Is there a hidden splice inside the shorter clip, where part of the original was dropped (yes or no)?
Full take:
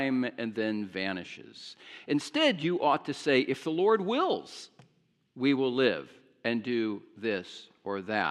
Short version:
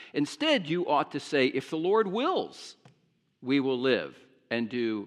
no